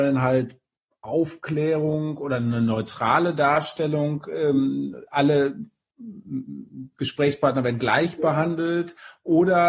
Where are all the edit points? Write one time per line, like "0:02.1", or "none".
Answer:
none